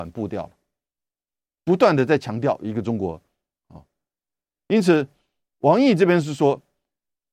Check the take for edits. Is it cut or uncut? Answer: uncut